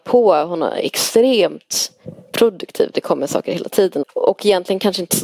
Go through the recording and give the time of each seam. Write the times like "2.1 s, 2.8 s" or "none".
4.0 s